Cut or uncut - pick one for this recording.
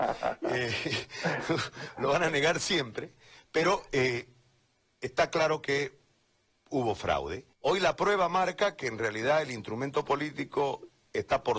cut